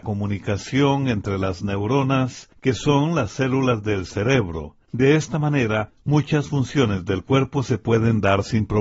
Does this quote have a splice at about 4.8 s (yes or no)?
no